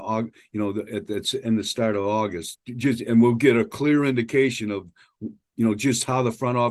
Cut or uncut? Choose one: cut